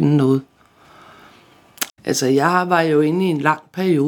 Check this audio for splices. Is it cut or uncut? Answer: cut